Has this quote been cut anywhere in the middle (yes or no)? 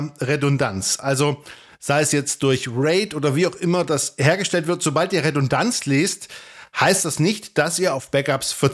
no